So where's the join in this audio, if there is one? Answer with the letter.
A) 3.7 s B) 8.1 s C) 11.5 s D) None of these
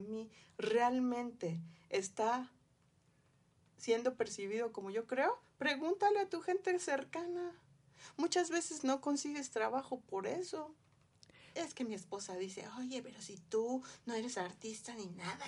C